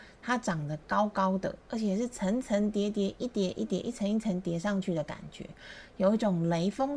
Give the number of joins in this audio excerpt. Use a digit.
1